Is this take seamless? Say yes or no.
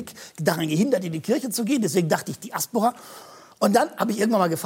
yes